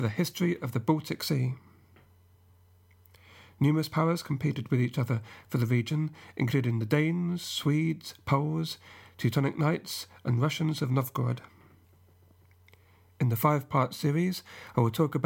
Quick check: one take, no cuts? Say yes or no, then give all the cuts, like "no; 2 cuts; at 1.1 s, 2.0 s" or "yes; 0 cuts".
yes; 0 cuts